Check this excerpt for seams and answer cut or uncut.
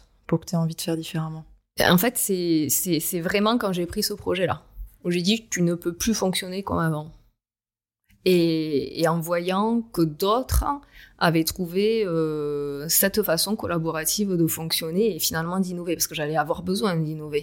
uncut